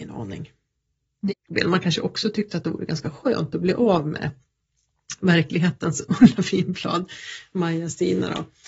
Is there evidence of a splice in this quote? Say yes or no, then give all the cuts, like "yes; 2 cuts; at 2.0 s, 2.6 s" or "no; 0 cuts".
yes; 1 cut; at 1.3 s